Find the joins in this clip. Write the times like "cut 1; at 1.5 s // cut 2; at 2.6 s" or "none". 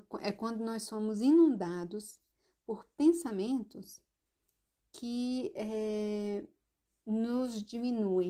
none